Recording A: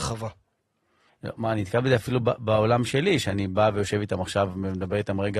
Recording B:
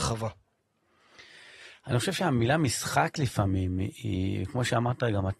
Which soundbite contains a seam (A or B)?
A